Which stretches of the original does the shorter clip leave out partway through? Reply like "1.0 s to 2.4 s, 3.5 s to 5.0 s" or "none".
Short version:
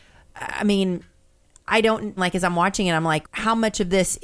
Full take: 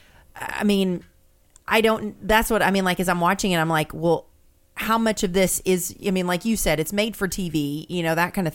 2.2 s to 2.8 s, 3.9 s to 4.7 s